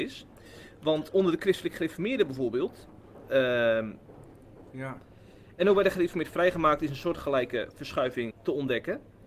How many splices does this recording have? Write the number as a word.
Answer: three